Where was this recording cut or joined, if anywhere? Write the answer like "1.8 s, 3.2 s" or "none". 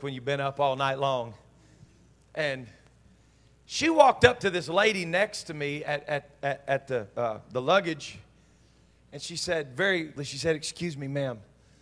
10.2 s

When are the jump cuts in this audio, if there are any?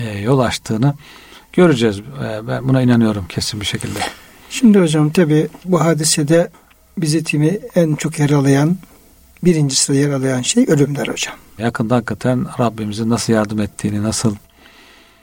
11.6 s

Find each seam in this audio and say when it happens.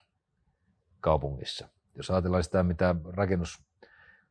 1.8 s

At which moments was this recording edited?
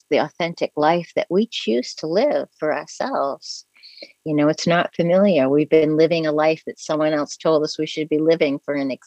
4.2 s

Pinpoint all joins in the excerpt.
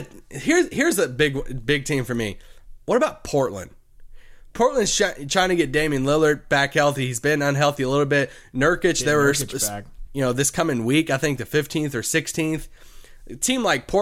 10.1 s

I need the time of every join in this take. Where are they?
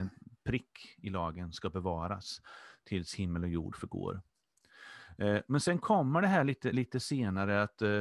none

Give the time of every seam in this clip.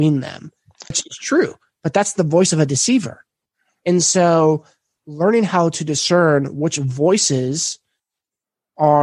0.9 s

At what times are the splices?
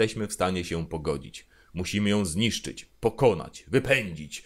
none

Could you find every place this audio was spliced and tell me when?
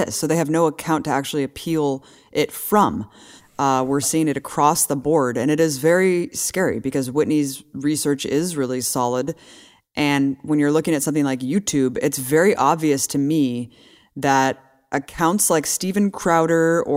none

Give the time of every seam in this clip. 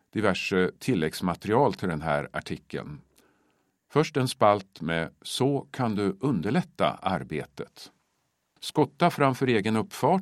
8.6 s

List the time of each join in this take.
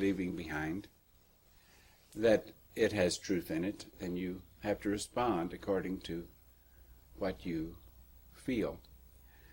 3.9 s

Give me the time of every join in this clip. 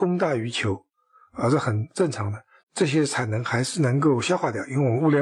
2.6 s

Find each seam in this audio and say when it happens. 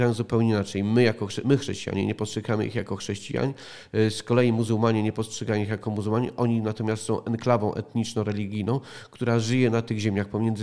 none

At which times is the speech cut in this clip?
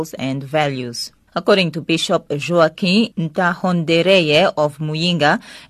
1.3 s

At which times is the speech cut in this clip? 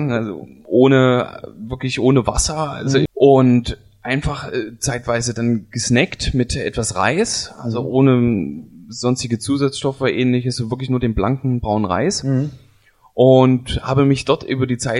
3.1 s

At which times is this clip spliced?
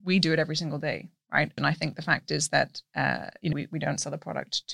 1.6 s, 3.5 s

